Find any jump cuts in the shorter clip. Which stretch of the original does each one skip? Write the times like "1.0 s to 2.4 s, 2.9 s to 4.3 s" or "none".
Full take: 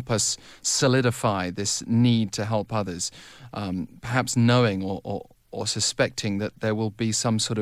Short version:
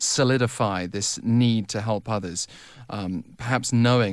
none